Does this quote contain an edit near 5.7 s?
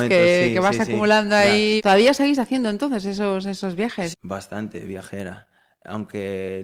no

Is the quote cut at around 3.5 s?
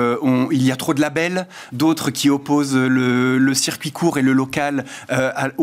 no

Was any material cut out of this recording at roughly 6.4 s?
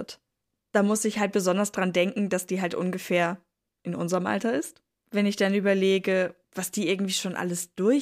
yes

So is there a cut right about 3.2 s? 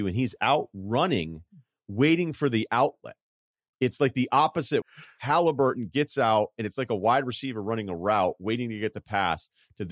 no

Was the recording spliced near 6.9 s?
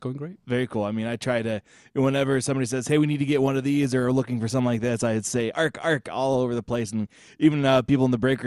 no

